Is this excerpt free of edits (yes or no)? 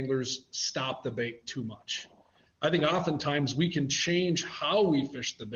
no